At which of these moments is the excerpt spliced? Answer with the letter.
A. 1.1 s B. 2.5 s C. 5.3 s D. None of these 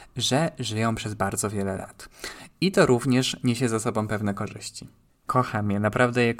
C